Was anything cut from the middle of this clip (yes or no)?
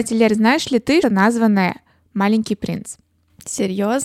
yes